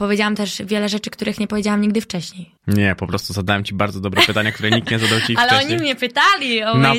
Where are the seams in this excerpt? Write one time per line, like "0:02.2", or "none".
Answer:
0:02.6